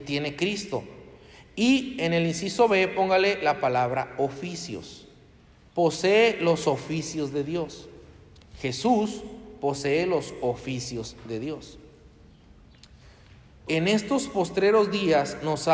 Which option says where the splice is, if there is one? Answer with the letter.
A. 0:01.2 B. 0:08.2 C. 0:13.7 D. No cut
C